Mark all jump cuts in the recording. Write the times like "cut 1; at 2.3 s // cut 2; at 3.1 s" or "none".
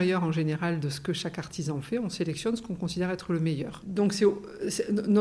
cut 1; at 3.8 s